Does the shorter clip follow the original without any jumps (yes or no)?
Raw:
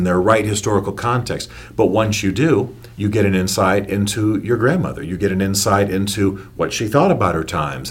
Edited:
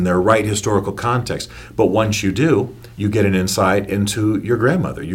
yes